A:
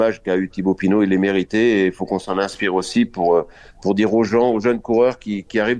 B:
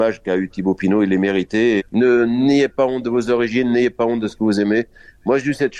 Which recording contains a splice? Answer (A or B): B